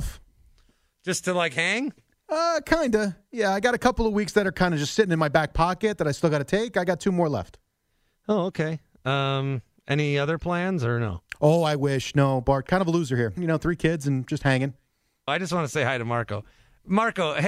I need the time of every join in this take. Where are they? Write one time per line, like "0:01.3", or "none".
0:13.4
0:15.3